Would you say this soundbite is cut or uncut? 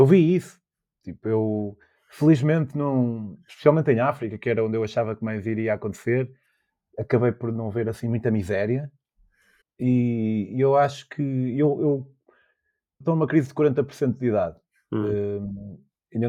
cut